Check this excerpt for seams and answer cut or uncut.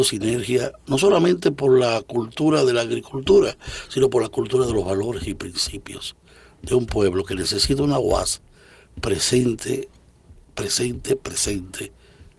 uncut